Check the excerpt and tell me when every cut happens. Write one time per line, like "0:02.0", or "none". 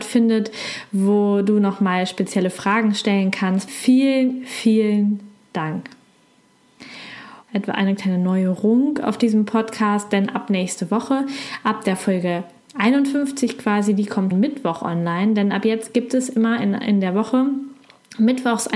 0:03.7
0:07.4
0:14.3